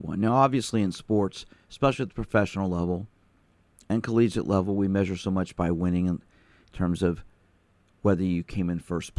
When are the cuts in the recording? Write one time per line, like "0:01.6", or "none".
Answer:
none